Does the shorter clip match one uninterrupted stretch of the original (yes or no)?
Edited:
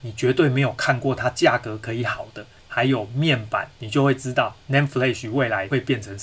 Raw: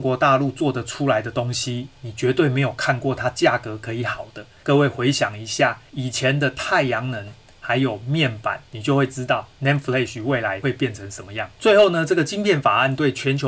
no